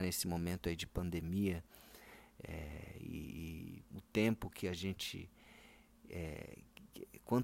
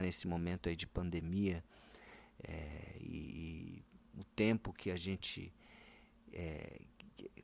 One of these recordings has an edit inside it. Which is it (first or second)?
first